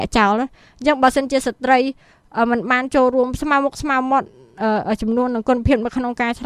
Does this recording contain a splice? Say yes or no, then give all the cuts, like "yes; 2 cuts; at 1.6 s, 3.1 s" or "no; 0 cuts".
no; 0 cuts